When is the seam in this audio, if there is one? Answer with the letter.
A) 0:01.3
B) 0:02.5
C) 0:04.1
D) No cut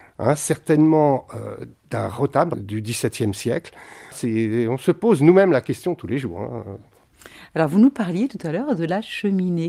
B